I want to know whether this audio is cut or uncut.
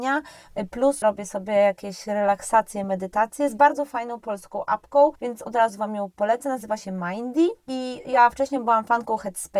cut